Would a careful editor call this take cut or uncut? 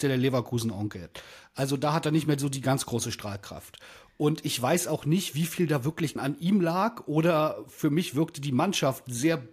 uncut